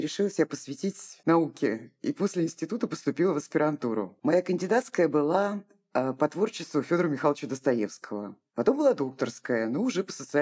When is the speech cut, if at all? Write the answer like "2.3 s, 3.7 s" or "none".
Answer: none